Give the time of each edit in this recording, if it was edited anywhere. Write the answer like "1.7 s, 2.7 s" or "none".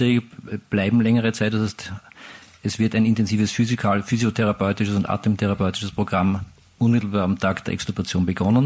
none